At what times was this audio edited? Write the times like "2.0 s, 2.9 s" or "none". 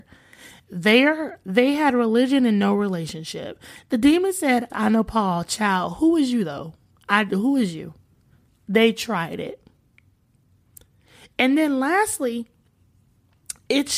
4.7 s, 8.5 s